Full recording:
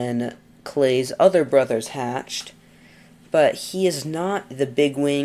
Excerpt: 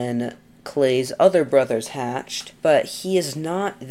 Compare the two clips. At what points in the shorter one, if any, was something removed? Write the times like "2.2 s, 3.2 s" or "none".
2.6 s